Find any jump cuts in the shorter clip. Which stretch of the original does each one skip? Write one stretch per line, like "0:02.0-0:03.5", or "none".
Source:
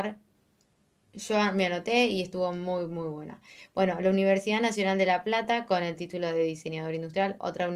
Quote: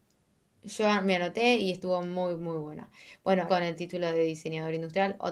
0:04.0-0:05.7

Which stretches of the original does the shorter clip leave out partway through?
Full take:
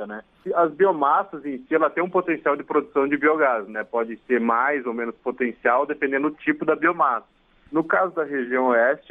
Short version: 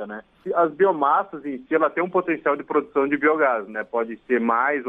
none

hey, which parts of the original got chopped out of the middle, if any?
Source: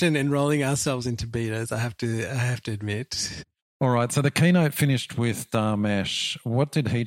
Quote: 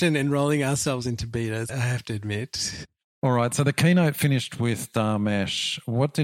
0:01.7-0:02.3

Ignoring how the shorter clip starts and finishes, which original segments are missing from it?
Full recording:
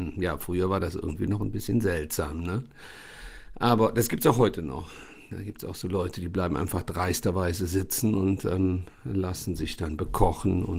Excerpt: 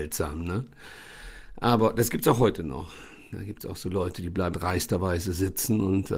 0:06.5-0:06.8

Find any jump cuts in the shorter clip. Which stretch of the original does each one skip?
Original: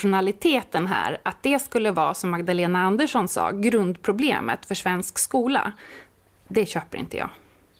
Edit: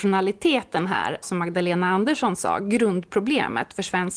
0:01.2-0:02.1

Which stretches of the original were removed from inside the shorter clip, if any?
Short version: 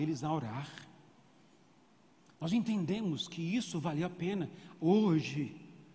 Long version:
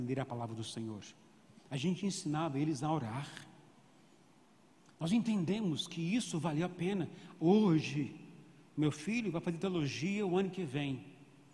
none

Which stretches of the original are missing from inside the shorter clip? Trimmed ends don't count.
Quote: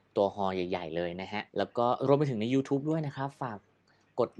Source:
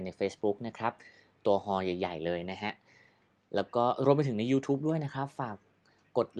0:02.8-0:03.5

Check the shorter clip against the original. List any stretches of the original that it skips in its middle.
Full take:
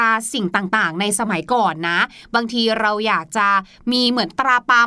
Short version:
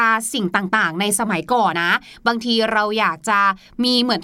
0:01.7-0:01.8

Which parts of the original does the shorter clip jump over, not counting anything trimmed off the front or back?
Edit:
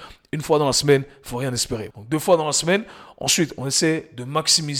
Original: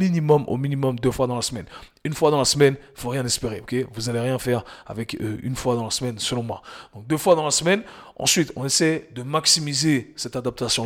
0:03.6-0:06.9

